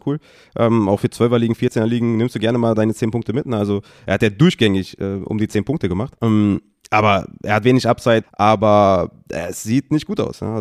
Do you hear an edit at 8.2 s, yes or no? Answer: yes